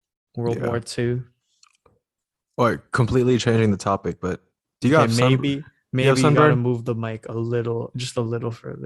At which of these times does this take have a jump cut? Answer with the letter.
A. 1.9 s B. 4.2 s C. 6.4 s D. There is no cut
D